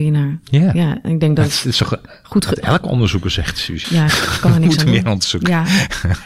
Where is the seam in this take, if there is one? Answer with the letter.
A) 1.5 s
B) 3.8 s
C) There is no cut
B